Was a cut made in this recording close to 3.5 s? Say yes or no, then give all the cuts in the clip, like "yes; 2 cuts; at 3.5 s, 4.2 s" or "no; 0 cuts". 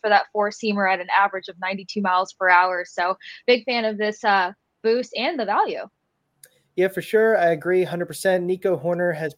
no; 0 cuts